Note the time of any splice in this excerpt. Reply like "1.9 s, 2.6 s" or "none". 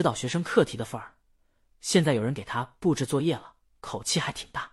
none